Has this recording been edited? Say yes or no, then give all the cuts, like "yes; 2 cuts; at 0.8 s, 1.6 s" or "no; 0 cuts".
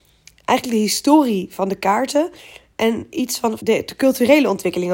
yes; 1 cut; at 3.6 s